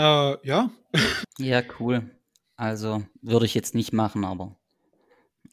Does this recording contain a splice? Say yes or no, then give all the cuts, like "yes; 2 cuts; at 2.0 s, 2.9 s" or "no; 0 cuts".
yes; 2 cuts; at 1.2 s, 3.1 s